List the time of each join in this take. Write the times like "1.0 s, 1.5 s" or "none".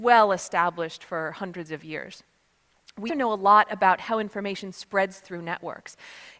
3.1 s

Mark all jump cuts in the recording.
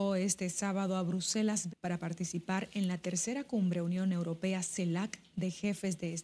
1.7 s

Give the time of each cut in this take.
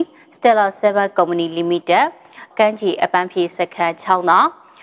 2.5 s

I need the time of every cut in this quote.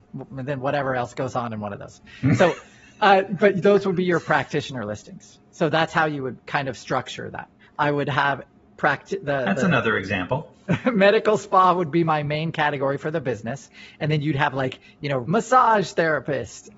7.6 s, 15.2 s

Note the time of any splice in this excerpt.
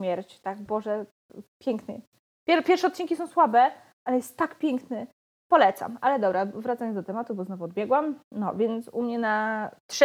5.4 s

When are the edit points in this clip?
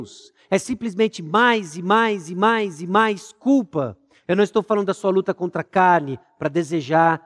4.2 s

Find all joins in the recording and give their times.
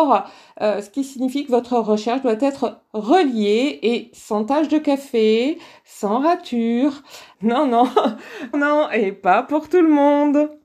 7.3 s, 8.5 s

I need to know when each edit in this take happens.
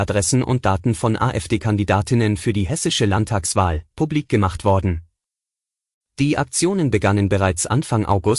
3.9 s

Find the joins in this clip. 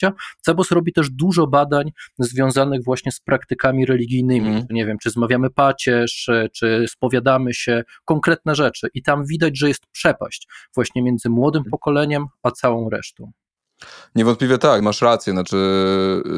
14.8 s

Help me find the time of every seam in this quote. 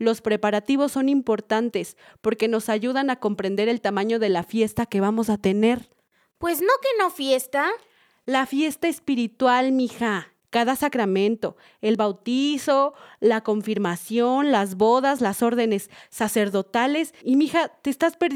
10.4 s, 17.2 s

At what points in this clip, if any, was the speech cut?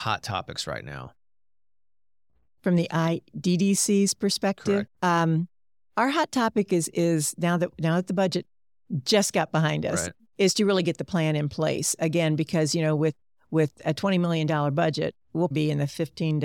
4.9 s, 15.5 s

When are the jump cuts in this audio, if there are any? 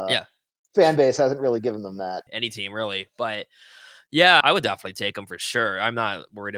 2.3 s, 4.4 s

